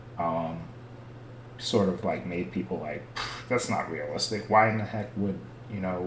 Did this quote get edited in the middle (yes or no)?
no